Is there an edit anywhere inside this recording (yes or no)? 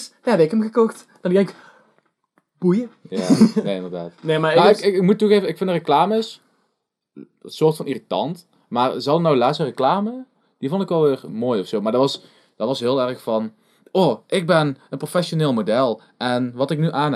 no